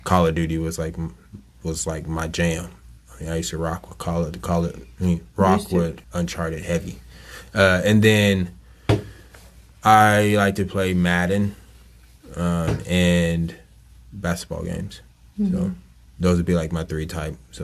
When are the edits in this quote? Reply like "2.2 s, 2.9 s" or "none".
6.0 s